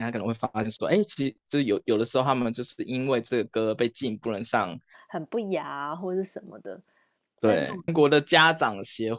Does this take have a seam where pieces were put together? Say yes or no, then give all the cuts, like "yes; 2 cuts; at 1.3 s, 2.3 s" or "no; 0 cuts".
yes; 2 cuts; at 4.9 s, 7.9 s